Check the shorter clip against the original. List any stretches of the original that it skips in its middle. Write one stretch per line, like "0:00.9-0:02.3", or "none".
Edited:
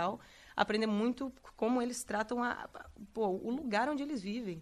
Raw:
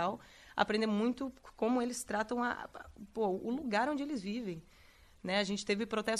none